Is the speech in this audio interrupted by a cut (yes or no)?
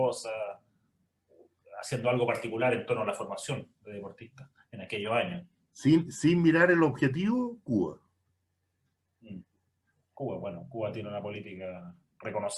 no